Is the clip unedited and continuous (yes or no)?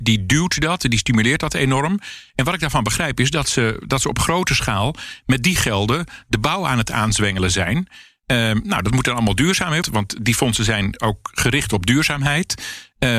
no